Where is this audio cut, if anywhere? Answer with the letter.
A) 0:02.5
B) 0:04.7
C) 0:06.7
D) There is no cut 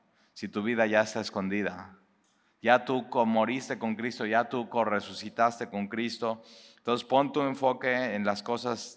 D